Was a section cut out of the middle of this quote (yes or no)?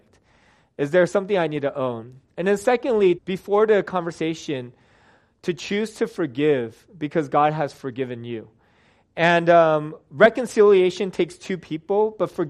yes